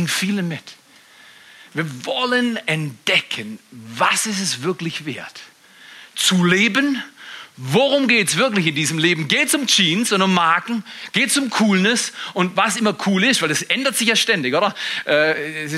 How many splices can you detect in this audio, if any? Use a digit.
0